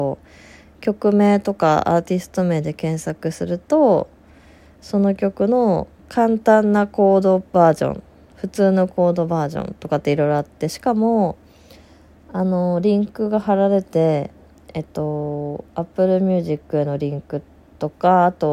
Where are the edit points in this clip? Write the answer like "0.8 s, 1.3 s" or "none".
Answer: 13.8 s

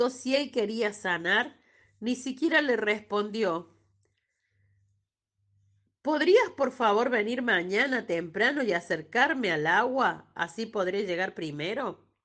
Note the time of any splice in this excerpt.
none

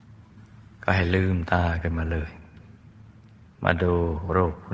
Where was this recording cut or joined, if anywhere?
none

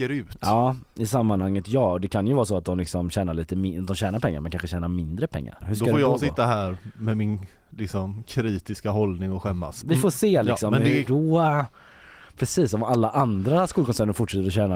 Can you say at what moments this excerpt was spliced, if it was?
5.6 s, 9.8 s, 11.1 s

